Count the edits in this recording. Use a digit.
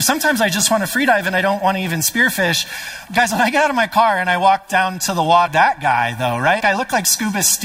3